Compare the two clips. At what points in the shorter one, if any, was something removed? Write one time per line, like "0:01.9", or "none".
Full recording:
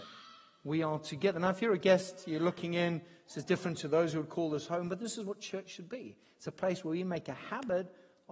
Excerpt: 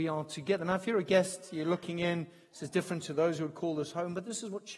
none